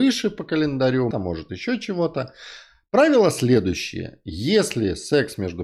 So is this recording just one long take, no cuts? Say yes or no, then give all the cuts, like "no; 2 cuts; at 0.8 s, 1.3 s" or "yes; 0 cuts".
no; 1 cut; at 1.1 s